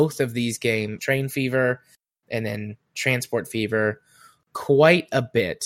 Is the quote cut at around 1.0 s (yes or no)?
yes